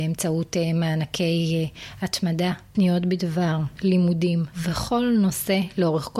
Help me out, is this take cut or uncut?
cut